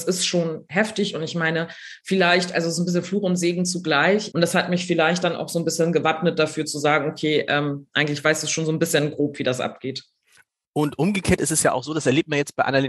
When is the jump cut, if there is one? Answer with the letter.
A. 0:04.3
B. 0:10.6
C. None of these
A